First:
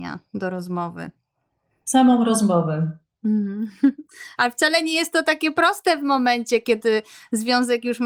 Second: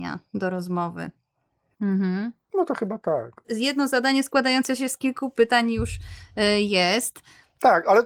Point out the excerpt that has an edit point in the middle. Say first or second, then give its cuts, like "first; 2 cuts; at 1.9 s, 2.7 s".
second; 1 cut; at 1.7 s